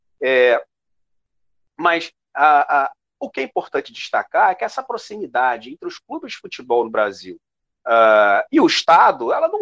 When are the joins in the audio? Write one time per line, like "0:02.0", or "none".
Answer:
none